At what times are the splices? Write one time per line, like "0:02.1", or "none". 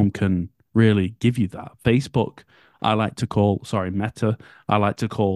none